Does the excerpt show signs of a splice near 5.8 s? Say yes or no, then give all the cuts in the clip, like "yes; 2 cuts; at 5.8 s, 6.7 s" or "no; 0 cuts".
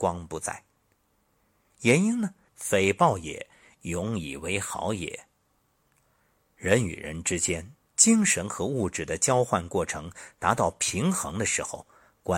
no; 1 cut; at 2.5 s